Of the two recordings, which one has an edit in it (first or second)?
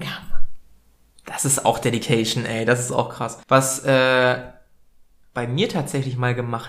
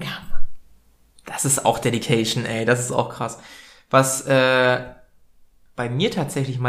first